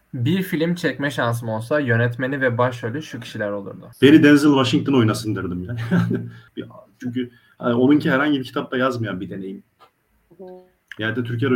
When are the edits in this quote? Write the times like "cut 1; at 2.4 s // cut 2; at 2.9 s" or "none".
cut 1; at 3.9 s // cut 2; at 6.5 s